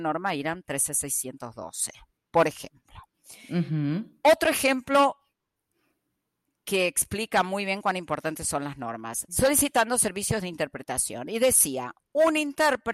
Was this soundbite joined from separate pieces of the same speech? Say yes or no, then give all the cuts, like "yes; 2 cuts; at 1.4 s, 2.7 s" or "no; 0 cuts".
yes; 1 cut; at 9.3 s